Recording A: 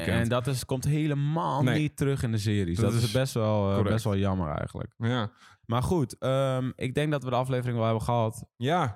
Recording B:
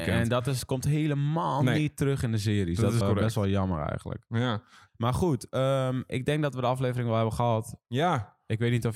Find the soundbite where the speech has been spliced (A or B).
B